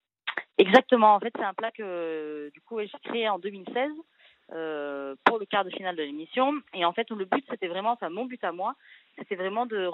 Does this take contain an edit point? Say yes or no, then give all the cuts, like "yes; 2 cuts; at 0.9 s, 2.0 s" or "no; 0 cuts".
yes; 1 cut; at 6.7 s